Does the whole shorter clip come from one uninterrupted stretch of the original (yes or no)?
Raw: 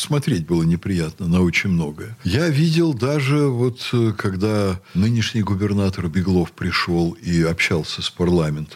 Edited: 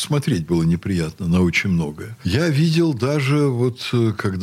yes